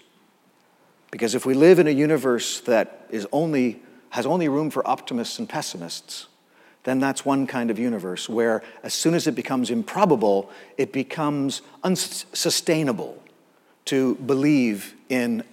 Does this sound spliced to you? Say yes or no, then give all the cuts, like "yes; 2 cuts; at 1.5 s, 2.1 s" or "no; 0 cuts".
no; 0 cuts